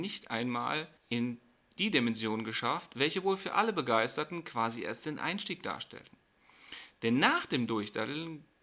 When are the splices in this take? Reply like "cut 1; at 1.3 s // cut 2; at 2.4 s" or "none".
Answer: cut 1; at 1.0 s